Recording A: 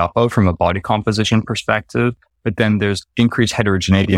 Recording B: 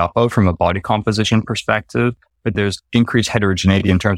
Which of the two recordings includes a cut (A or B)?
B